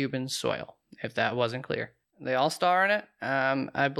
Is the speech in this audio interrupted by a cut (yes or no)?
yes